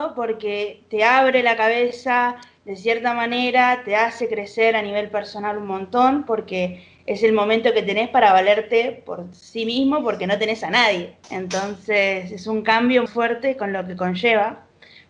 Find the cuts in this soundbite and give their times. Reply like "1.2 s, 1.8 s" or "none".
11.2 s, 13.1 s